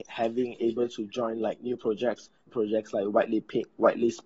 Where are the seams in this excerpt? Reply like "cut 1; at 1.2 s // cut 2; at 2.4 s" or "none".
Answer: cut 1; at 2.5 s

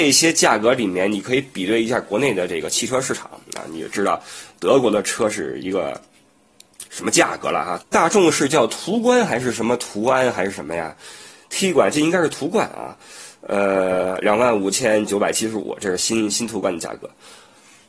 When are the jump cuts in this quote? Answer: cut 1; at 7.8 s

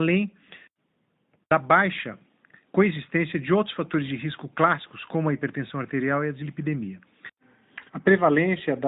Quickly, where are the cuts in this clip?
cut 1; at 7.9 s

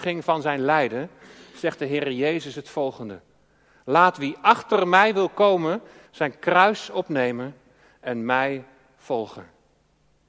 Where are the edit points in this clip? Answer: cut 1; at 6.1 s

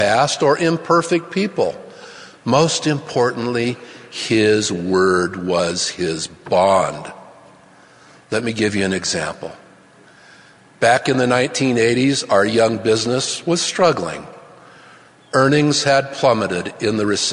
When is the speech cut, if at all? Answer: none

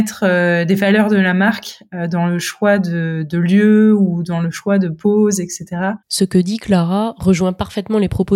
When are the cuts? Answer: none

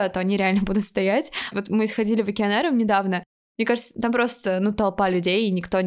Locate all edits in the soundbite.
cut 1; at 1.5 s

